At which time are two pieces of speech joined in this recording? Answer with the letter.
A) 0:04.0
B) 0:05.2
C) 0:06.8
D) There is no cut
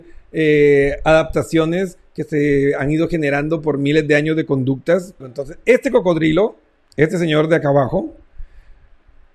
B